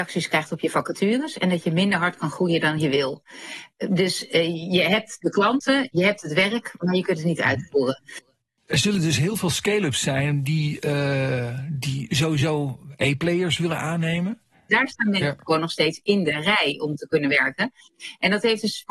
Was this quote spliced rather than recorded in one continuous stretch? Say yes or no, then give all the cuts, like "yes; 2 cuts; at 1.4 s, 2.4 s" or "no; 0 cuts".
yes; 1 cut; at 14.7 s